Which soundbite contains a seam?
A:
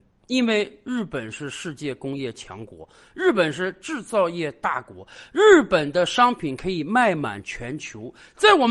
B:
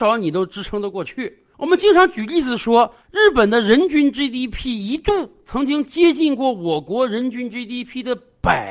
B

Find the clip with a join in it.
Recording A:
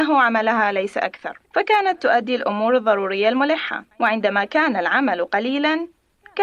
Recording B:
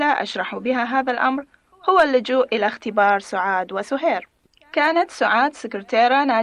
A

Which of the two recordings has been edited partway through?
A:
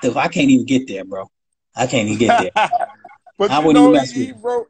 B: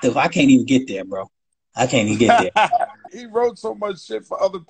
B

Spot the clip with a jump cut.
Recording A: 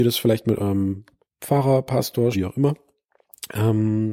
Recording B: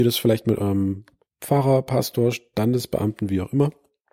A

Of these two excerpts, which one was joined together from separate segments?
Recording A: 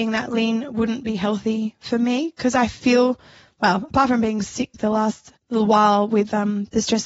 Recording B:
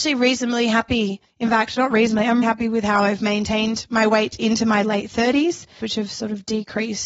B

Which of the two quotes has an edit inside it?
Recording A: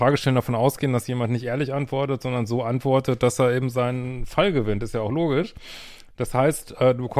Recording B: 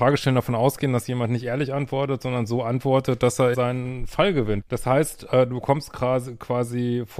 B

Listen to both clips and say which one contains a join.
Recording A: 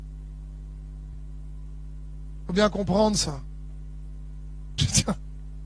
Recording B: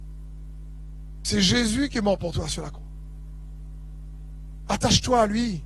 A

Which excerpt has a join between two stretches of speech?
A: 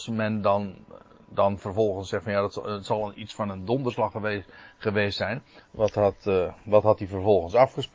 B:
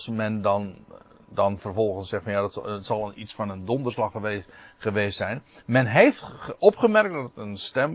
A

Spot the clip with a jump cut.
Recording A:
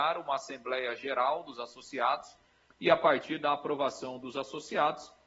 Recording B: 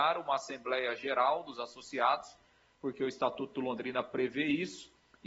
A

